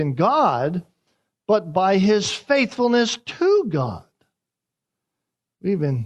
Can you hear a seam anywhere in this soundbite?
no; 0 cuts

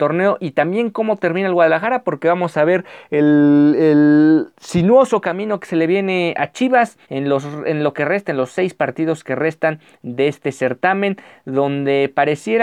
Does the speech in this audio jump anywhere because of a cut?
yes; 1 cut; at 7.0 s

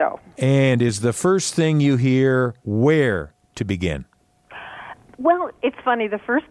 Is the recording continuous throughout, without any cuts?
no; 1 cut; at 2.6 s

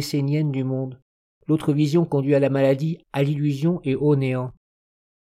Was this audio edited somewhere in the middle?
yes; 2 cuts; at 1.2 s, 3.0 s

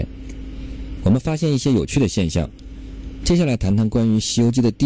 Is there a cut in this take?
yes; 2 cuts; at 1.0 s, 3.2 s

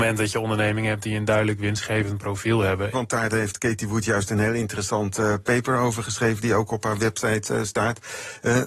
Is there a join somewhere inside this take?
yes; 1 cut; at 2.9 s

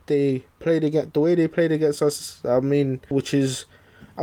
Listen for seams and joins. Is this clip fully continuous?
no; 1 cut; at 3.1 s

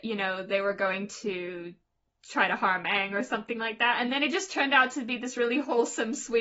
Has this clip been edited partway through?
no; 0 cuts

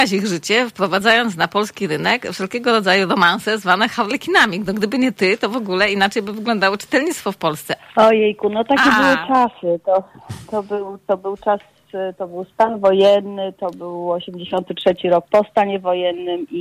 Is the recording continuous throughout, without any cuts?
no; 1 cut; at 7.8 s

